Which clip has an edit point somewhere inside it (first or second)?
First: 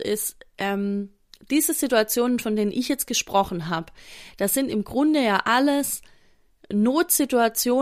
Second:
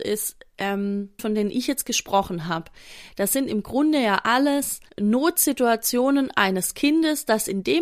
second